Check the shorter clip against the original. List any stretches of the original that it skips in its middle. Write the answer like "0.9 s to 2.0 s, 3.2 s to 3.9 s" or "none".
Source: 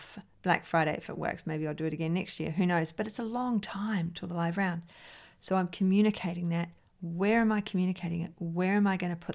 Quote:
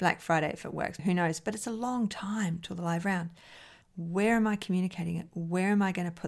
1.4 s to 2.5 s, 5.3 s to 6.9 s